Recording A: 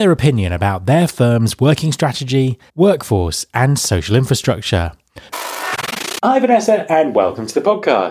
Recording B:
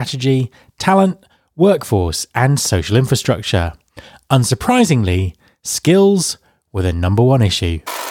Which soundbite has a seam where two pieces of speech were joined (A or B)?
A